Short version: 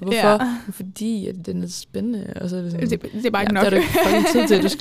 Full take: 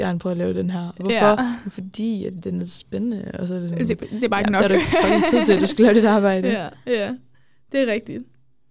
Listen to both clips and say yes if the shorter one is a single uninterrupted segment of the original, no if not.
yes